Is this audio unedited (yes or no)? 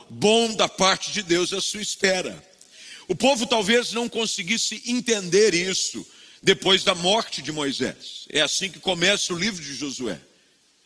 yes